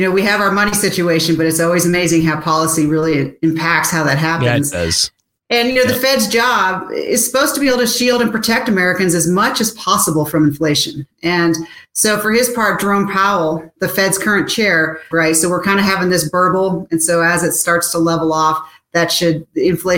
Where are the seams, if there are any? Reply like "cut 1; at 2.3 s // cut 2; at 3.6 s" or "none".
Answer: cut 1; at 15.1 s